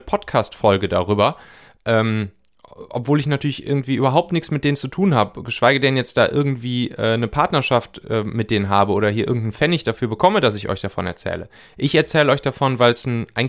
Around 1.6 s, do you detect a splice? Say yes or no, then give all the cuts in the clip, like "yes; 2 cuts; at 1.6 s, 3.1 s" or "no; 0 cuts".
no; 0 cuts